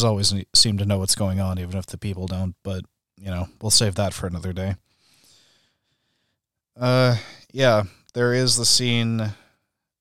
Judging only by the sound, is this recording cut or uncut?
uncut